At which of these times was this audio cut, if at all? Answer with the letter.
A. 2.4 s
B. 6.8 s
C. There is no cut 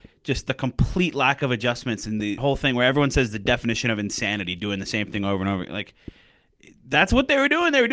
A